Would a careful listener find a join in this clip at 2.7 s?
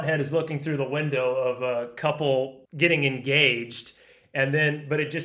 yes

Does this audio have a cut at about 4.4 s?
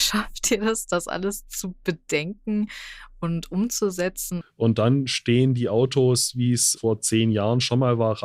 yes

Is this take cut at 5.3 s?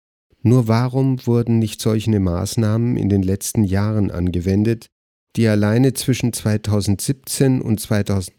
yes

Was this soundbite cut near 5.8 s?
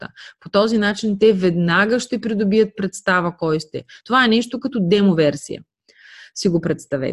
no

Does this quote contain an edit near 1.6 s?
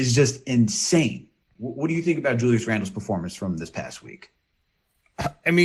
yes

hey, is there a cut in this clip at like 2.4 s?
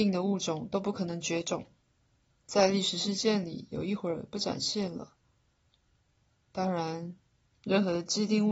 yes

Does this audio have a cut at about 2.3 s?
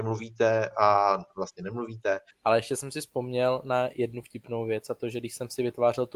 yes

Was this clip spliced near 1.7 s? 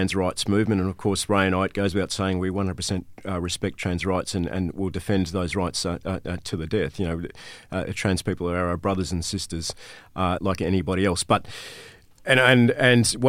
no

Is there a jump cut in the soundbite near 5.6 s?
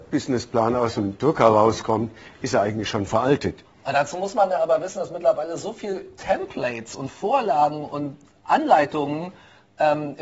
no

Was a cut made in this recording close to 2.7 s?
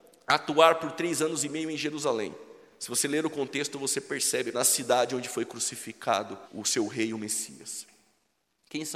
no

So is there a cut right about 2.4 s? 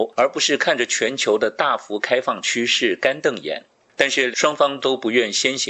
no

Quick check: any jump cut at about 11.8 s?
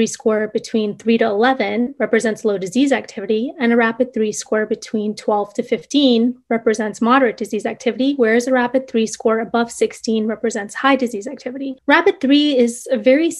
yes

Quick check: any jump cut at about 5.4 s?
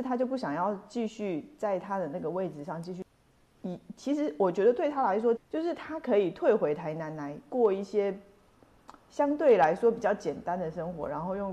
yes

